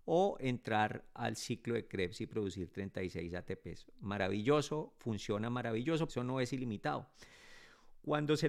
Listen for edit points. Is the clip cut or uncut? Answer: cut